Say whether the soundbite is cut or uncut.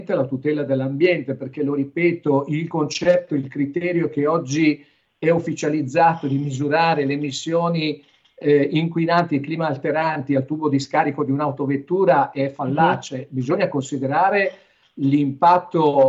uncut